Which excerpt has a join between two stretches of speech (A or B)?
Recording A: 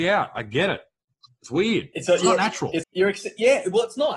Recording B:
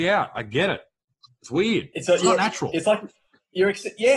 A